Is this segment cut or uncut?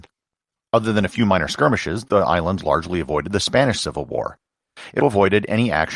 cut